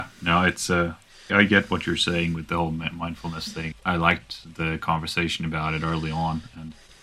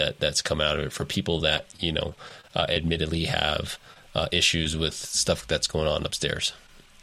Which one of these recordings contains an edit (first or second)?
first